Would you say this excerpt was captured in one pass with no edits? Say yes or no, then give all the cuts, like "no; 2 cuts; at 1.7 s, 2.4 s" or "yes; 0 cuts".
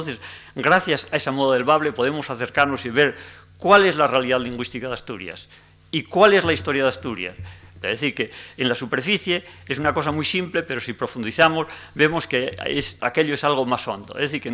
no; 2 cuts; at 7.8 s, 13.0 s